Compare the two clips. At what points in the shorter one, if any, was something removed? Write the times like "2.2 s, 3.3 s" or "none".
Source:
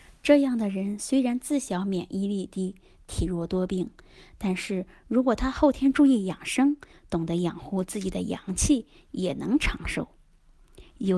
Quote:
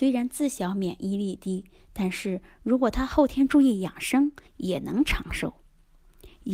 1.9 s, 4.4 s